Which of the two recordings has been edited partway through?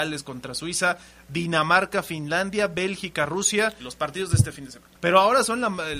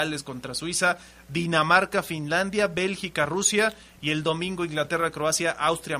first; 2 cuts; at 3.8 s, 5.0 s

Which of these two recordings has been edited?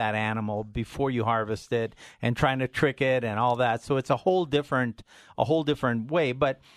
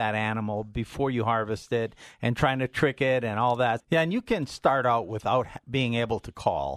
second; 1 cut; at 3.8 s

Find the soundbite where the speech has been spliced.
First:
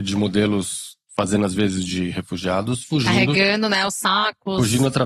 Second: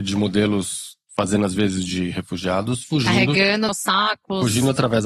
second; 1 cut; at 3.7 s

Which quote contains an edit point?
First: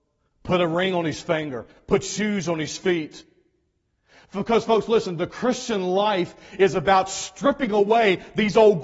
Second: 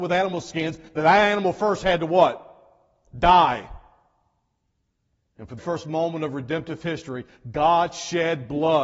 second; 1 cut; at 5.6 s

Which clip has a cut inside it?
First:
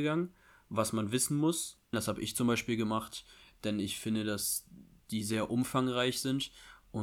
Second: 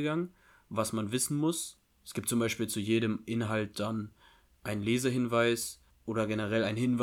first; 1 cut; at 1.9 s

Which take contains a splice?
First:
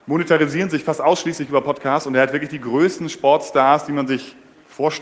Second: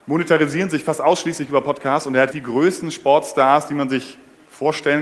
second; 1 cut; at 2.3 s

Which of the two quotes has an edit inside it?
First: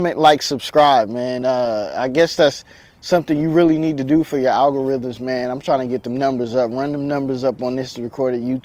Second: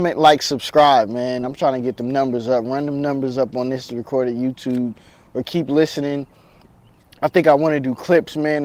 second; 1 cut; at 1.4 s

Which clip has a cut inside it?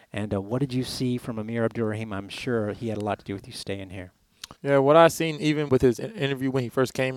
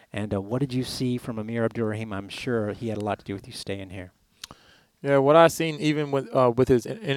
first; 2 cuts; at 4.6 s, 5.7 s

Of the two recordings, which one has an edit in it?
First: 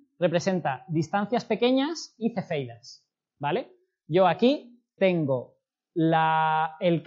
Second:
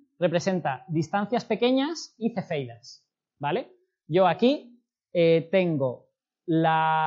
first; 1 cut; at 5.0 s

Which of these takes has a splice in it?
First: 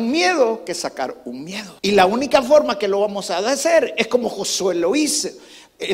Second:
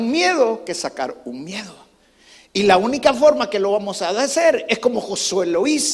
first; 1 cut; at 1.8 s

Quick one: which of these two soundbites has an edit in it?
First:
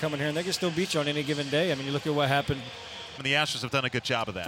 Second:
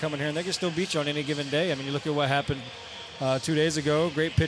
first; 1 cut; at 3.2 s

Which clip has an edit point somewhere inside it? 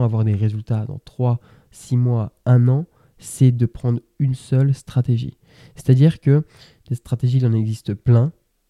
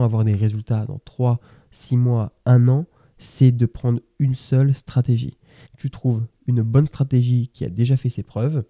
second; 1 cut; at 5.7 s

